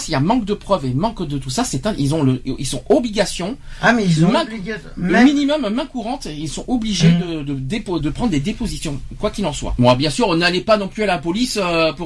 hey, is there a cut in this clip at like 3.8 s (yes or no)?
no